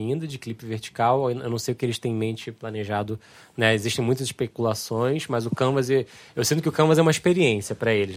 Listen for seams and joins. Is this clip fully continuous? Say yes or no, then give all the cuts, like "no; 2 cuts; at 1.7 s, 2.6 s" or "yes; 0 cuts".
yes; 0 cuts